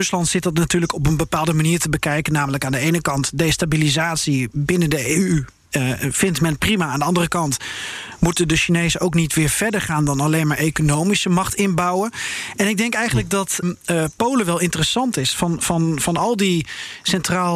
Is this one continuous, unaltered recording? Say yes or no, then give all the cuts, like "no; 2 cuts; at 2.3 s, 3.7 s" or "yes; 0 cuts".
no; 1 cut; at 13.6 s